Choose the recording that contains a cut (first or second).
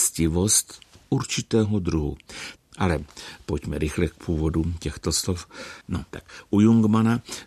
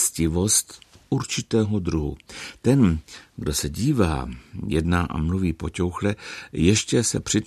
first